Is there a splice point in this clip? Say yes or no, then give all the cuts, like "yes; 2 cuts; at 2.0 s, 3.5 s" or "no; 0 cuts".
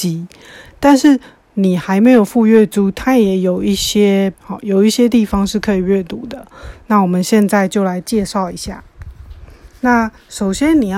yes; 1 cut; at 4.3 s